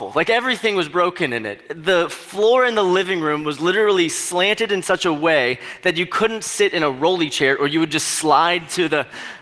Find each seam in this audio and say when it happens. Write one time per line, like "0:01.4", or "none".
none